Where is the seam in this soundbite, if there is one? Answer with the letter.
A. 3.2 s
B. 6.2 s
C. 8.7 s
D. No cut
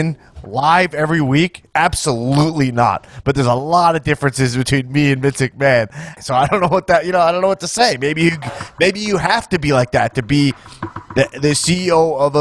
B